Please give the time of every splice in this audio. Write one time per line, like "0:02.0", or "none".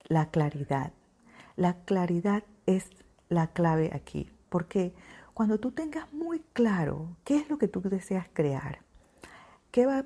none